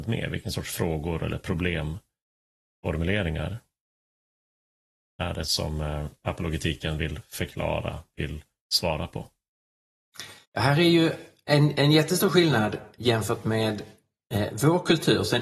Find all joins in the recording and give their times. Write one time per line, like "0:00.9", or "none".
0:05.4
0:10.4